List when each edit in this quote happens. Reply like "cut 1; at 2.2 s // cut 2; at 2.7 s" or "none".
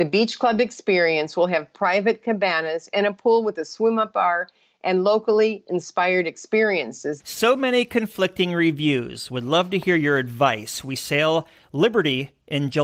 cut 1; at 7.2 s